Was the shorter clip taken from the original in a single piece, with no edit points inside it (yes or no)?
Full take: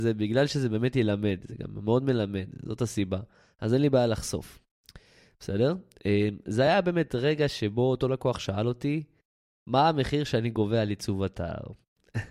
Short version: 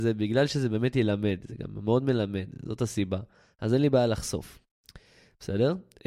yes